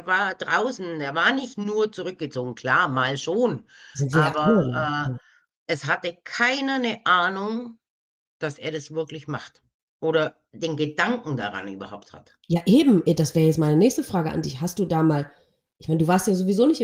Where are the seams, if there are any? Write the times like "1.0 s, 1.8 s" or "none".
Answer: none